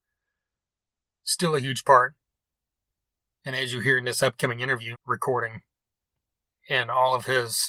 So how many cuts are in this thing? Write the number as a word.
two